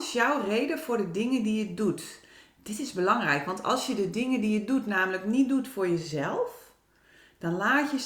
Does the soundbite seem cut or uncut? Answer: uncut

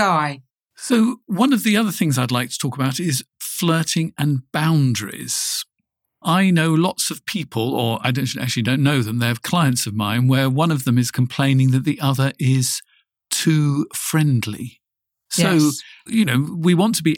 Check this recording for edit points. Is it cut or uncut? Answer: uncut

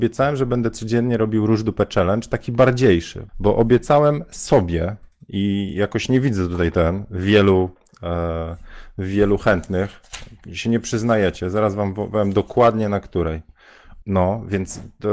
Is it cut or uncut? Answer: cut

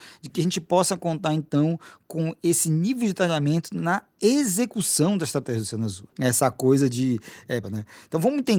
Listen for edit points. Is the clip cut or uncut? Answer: cut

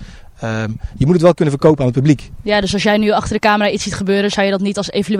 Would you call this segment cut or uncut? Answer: uncut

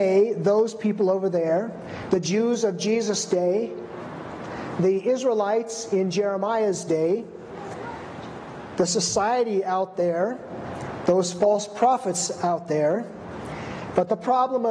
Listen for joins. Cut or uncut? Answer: uncut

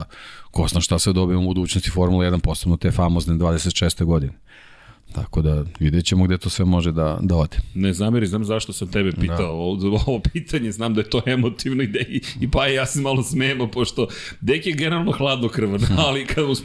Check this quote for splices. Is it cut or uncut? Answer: uncut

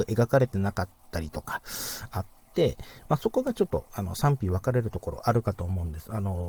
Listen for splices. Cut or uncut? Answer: uncut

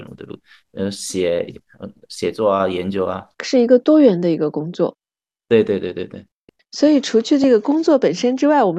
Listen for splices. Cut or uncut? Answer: uncut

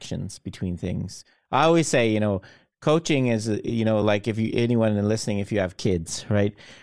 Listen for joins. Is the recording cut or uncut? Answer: uncut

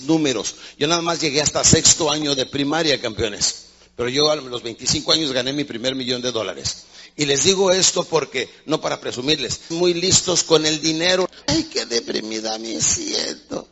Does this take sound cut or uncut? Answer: cut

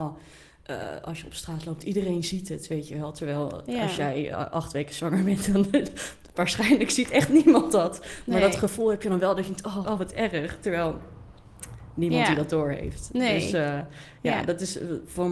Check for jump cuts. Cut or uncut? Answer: cut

